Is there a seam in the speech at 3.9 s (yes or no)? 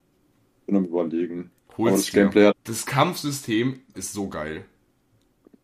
yes